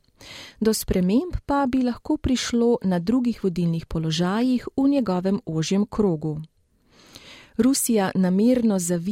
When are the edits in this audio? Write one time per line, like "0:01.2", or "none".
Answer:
none